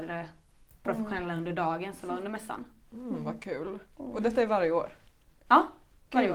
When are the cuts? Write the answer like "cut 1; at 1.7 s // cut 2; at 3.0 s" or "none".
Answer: none